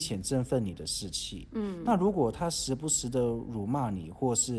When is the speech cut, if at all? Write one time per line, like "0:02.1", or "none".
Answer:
none

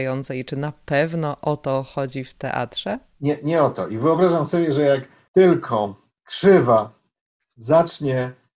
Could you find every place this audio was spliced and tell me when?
none

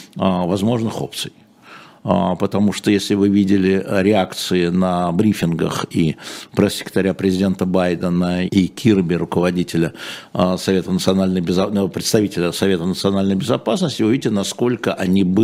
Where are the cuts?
0:01.9
0:08.5

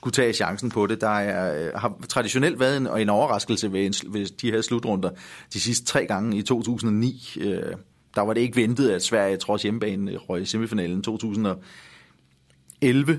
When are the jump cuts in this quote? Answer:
none

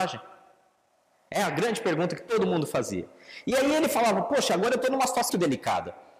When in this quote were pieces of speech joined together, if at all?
0:05.3

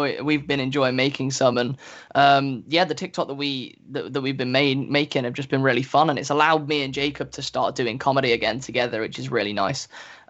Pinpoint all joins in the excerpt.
none

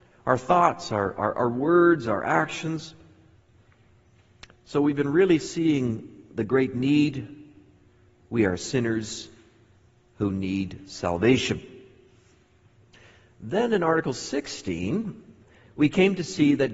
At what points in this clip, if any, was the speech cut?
none

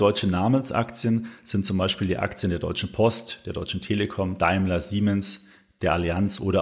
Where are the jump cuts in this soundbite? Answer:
none

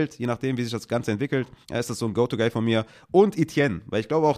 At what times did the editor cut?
0:01.6

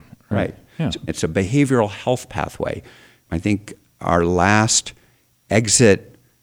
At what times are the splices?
0:01.1
0:03.2

